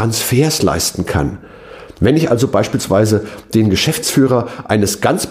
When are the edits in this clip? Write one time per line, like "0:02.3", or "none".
none